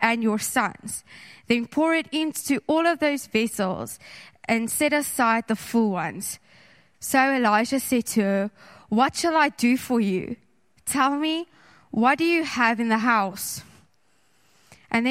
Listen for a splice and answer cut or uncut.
cut